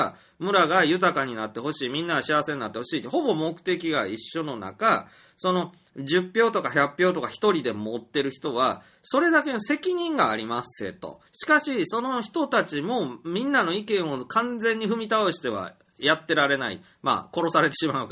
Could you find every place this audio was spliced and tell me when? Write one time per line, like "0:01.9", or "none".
0:11.3